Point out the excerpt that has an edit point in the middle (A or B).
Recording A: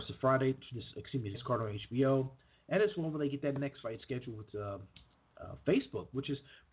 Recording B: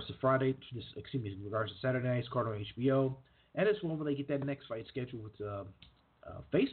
A